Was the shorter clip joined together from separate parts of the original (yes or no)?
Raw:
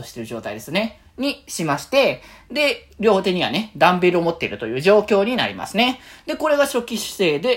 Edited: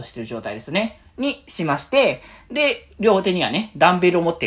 no